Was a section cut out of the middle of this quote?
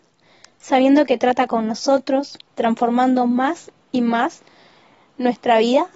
yes; 1 cut; at 2.5 s

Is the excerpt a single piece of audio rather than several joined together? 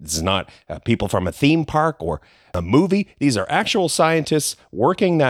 yes; 0 cuts

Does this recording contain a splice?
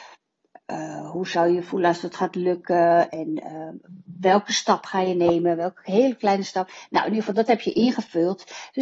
no; 0 cuts

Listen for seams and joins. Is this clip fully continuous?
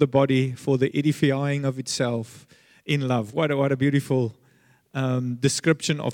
yes; 0 cuts

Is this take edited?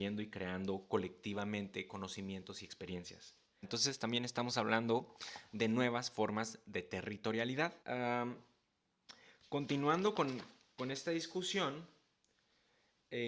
yes; 2 cuts; at 3.6 s, 7.8 s

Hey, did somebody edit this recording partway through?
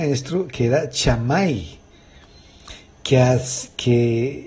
no; 0 cuts

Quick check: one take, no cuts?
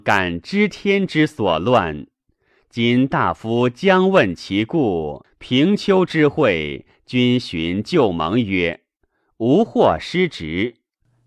no; 1 cut; at 5.2 s

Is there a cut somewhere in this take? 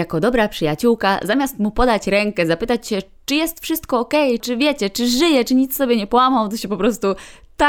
yes; 1 cut; at 4.4 s

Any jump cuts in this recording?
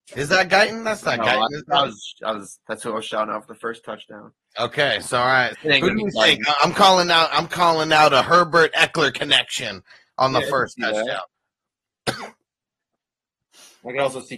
yes; 2 cuts; at 5.5 s, 11.3 s

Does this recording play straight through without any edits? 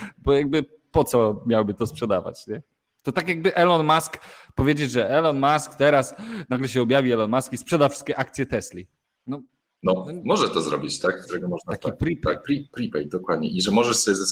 no; 2 cuts; at 11.2 s, 12.4 s

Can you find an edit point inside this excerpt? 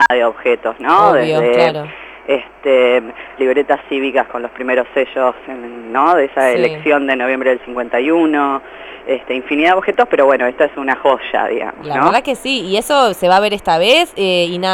yes; 1 cut; at 3.4 s

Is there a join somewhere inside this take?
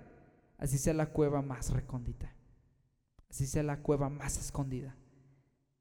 no; 0 cuts

